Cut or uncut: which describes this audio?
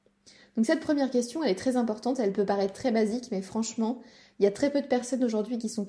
uncut